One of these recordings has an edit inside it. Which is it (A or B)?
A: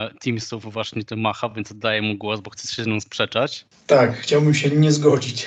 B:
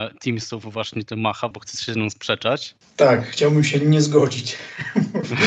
B